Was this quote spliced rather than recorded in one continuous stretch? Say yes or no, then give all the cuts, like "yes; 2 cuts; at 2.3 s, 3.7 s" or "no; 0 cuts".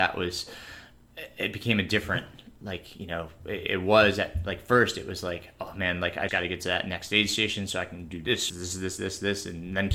yes; 2 cuts; at 6.3 s, 8.5 s